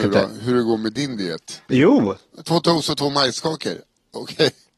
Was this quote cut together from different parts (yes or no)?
yes